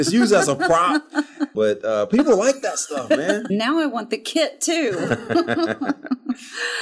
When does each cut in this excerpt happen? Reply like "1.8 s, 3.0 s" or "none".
1.5 s, 3.5 s